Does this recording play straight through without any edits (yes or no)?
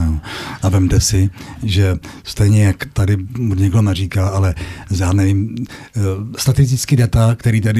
yes